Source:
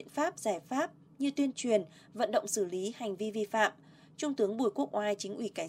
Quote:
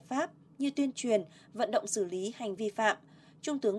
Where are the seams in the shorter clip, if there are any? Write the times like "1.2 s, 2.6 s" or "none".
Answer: 2.6 s